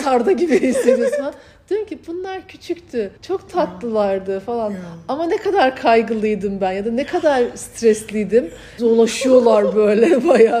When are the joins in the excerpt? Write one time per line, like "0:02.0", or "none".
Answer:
0:03.2
0:08.8